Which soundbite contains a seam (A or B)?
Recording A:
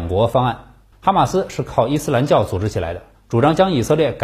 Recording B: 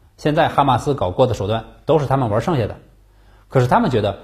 A